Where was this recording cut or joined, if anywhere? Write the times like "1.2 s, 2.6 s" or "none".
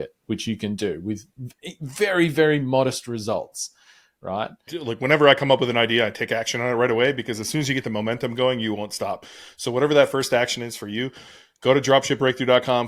4.7 s